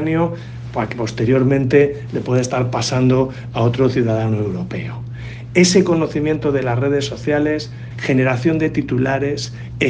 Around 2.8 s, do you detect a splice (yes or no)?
no